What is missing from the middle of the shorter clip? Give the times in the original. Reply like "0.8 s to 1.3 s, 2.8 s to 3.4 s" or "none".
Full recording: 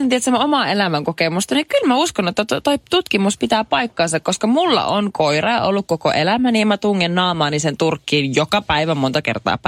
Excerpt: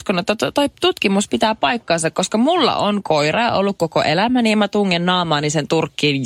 none